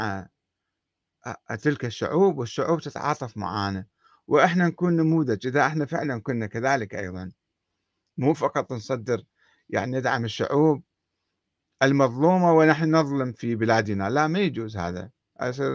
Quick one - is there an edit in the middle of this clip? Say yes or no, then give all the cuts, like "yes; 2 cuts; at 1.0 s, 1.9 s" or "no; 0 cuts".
no; 0 cuts